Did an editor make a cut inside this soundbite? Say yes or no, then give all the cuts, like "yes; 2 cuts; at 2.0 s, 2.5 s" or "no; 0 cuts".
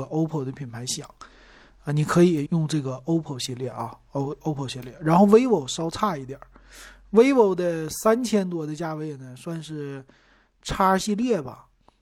yes; 1 cut; at 2.5 s